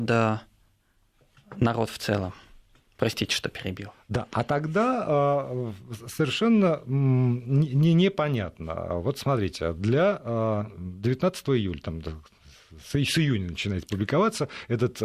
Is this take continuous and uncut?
yes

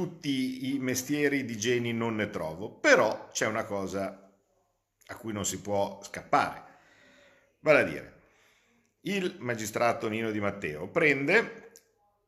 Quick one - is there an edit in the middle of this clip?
no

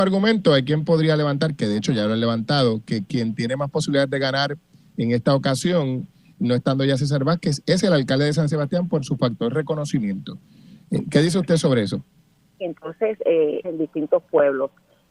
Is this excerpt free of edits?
no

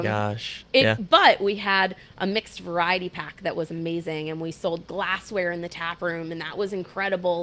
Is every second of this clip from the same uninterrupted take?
yes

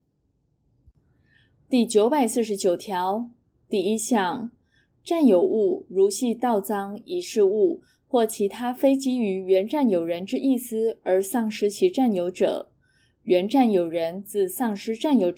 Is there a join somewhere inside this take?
no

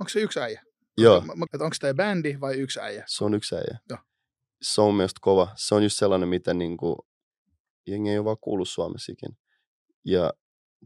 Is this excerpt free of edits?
no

